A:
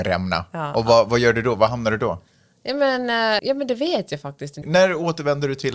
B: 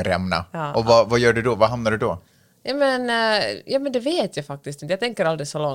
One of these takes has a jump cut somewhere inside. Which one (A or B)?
A